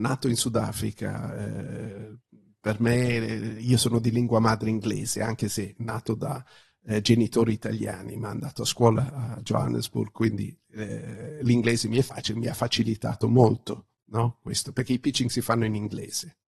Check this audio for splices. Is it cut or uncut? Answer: uncut